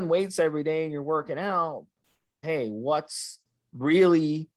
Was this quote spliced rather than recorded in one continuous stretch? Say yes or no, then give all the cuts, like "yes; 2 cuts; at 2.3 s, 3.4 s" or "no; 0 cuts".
yes; 1 cut; at 2.4 s